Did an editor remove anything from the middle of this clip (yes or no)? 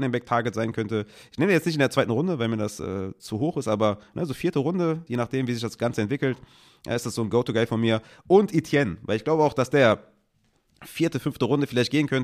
yes